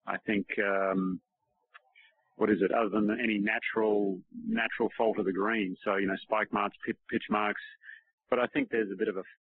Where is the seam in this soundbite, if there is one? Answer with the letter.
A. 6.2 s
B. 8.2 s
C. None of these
C